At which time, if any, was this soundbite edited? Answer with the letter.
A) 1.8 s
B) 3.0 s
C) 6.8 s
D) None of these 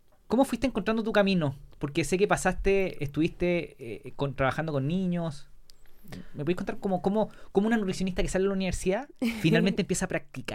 D